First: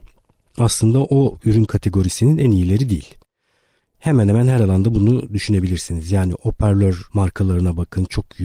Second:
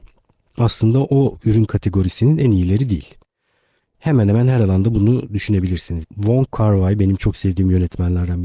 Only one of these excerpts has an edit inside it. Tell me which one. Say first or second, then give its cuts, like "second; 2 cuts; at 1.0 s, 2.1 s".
second; 1 cut; at 6.0 s